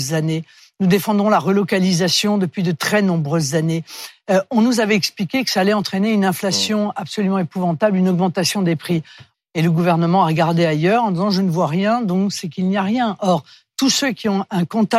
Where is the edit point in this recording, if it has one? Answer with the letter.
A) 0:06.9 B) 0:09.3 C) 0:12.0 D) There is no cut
B